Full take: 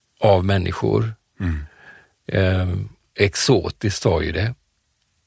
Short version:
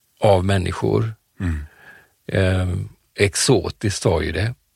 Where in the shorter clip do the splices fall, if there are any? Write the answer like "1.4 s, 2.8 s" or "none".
none